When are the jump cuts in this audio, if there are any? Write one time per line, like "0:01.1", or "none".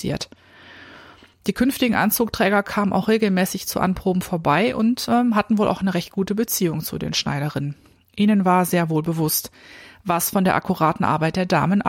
none

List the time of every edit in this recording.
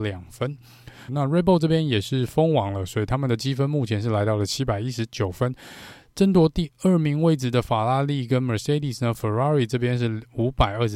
0:01.1

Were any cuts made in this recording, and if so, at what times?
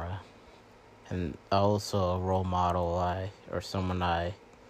0:01.0

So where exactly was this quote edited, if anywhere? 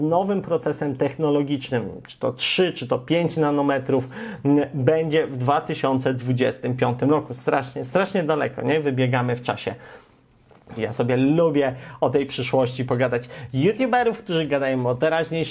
0:10.8

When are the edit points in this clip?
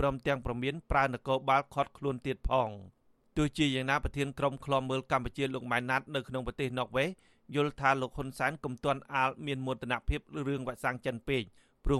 none

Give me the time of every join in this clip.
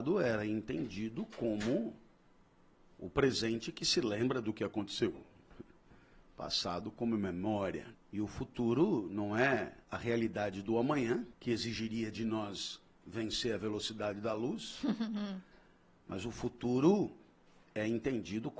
0:07.9
0:09.8
0:11.3

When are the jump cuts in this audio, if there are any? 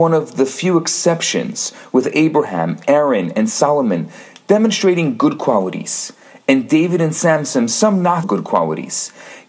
0:08.2

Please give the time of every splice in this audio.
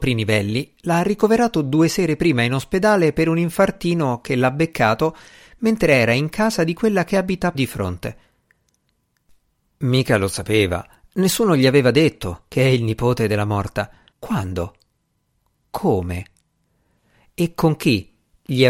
0:07.5
0:14.1

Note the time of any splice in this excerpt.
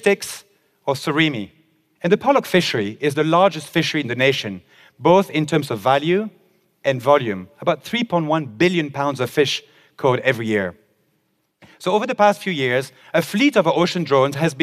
0:01.9

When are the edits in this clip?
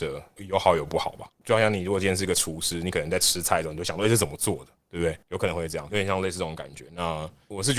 0:05.9

